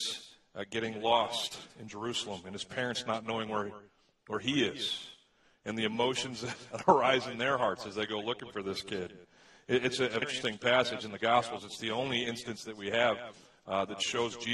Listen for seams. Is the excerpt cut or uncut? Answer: cut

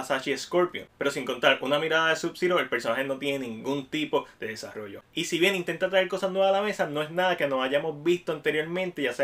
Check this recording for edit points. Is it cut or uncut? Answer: cut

